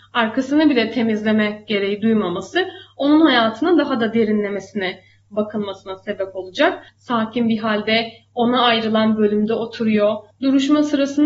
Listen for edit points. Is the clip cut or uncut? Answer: cut